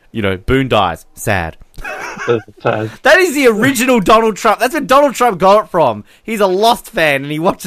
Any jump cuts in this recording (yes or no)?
no